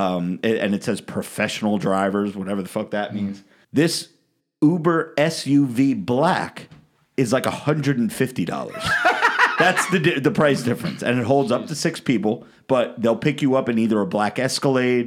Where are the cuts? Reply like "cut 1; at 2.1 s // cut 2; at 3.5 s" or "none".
cut 1; at 3.6 s